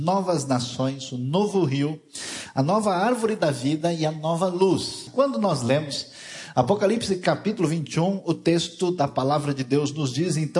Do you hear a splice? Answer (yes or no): yes